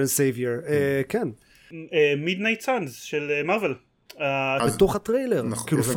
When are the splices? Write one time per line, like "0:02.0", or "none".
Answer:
0:04.6